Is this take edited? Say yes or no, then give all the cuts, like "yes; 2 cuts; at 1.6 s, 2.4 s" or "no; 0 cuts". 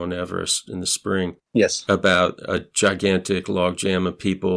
no; 0 cuts